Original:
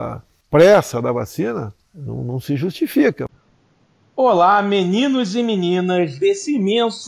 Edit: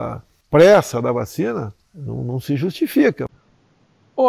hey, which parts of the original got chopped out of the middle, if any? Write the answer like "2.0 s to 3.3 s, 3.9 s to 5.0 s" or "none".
none